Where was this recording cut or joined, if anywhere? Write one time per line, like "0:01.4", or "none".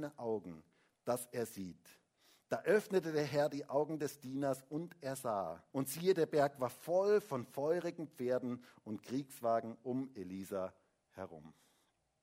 0:05.7